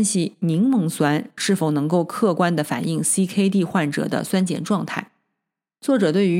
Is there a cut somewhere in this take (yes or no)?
no